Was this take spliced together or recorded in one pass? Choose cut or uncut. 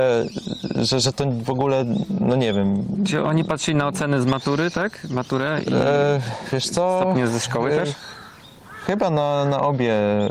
uncut